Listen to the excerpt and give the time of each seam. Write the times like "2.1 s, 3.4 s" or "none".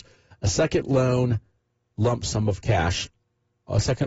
none